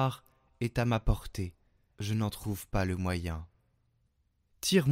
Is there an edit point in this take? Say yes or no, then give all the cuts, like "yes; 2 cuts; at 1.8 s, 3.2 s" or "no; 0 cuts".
yes; 1 cut; at 1.9 s